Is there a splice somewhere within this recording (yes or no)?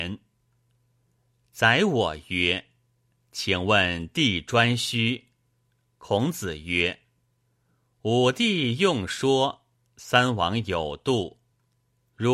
no